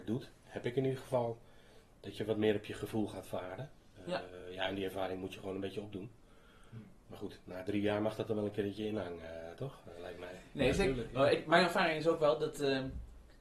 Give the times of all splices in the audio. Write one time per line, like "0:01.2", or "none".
none